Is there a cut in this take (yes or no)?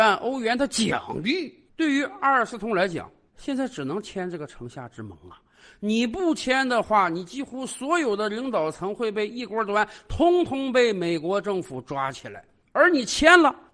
no